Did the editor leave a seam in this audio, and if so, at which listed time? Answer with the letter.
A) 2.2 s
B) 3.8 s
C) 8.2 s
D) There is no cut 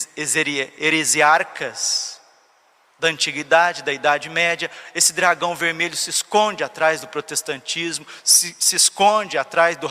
D